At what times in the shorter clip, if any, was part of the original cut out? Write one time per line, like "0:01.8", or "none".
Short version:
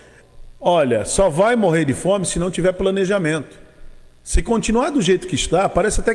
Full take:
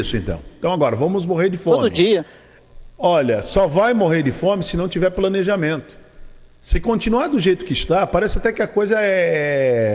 none